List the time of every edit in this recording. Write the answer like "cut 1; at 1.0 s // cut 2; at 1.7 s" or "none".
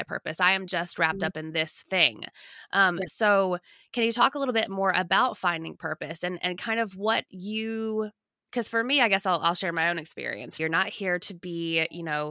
cut 1; at 10.6 s

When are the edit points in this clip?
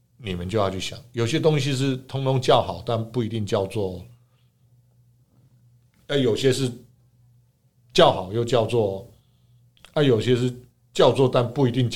none

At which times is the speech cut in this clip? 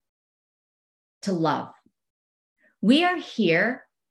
none

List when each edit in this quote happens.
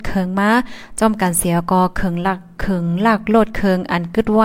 none

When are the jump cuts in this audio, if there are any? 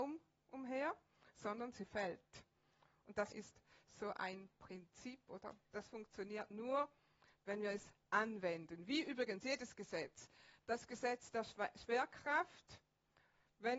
cut 1; at 3.3 s // cut 2; at 5.7 s

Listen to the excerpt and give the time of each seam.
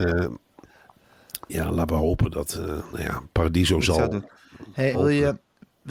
cut 1; at 4.9 s

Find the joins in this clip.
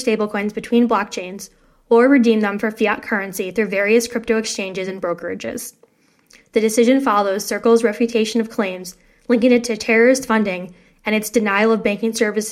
none

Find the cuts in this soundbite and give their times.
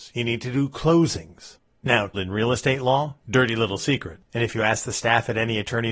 cut 1; at 2.1 s // cut 2; at 4.2 s

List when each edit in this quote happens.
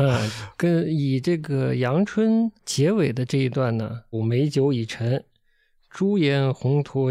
cut 1; at 2.6 s // cut 2; at 4.1 s

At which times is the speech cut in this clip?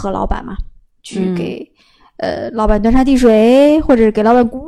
none

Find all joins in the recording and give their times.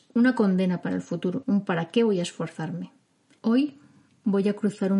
cut 1; at 1.4 s // cut 2; at 3.4 s

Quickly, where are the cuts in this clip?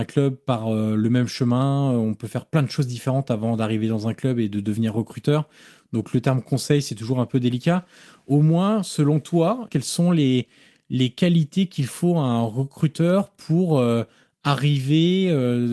cut 1; at 9.7 s

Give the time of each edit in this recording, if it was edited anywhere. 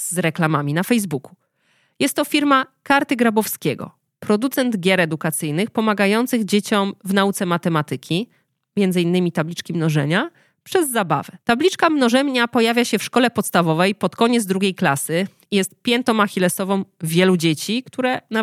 cut 1; at 11.4 s

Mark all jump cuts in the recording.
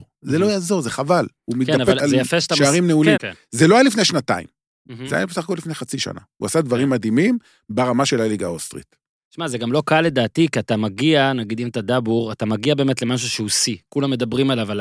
cut 1; at 2.0 s // cut 2; at 3.2 s

